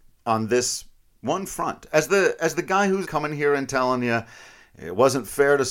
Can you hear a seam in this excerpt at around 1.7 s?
no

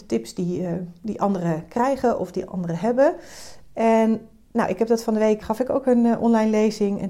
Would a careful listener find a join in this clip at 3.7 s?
no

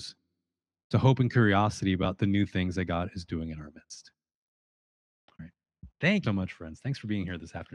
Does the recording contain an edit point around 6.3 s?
yes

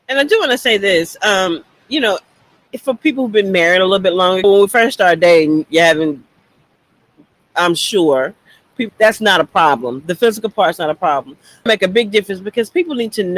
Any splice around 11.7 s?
yes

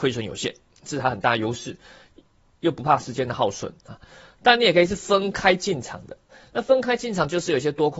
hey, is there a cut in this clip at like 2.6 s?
no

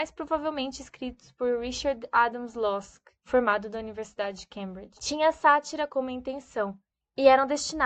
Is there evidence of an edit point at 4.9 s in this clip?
no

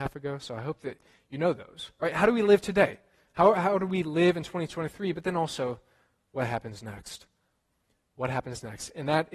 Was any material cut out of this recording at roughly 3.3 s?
no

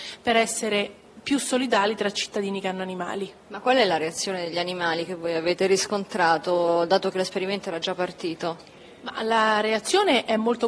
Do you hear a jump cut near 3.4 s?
yes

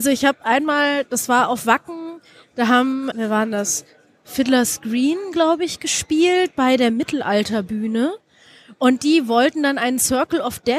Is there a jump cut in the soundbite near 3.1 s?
yes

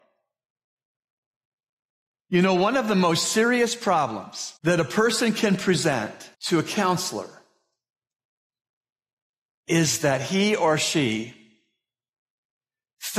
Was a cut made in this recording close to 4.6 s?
yes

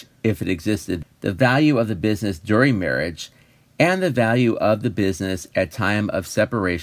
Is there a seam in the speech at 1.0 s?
yes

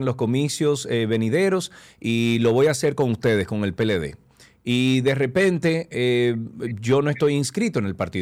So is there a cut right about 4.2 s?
no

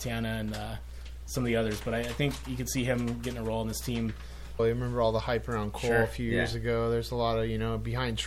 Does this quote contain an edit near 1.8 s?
no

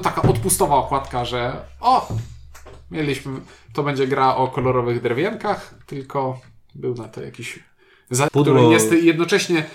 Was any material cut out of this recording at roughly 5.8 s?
no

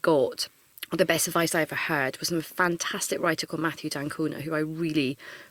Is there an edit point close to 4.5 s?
no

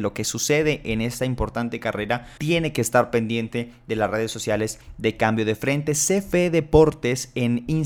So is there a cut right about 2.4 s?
yes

